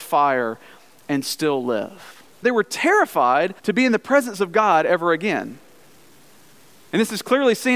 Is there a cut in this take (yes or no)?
yes